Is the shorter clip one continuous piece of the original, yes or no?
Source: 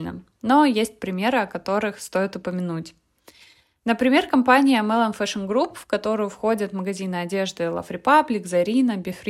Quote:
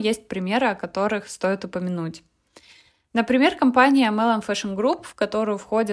yes